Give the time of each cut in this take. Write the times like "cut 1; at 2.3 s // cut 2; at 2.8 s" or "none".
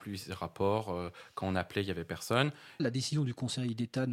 cut 1; at 2.8 s